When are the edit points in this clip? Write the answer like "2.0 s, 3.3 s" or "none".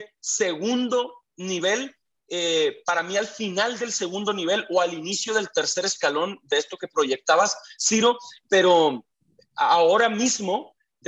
none